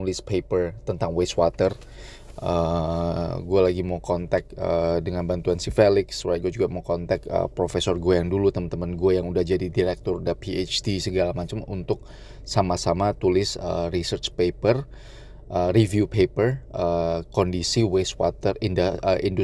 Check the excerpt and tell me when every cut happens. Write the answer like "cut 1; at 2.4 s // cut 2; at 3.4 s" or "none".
none